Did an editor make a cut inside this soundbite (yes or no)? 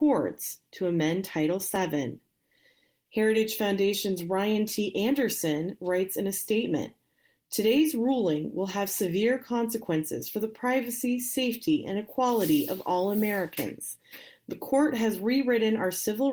no